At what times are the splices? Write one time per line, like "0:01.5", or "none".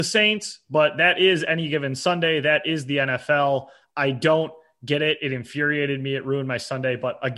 none